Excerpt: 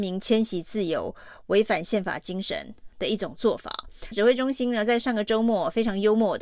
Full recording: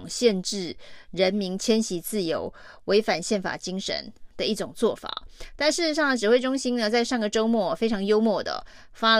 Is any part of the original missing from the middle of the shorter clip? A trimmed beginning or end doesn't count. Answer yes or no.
yes